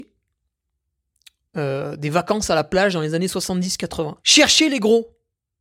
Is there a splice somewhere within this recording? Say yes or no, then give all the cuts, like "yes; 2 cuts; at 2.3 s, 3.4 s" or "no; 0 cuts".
yes; 1 cut; at 4.2 s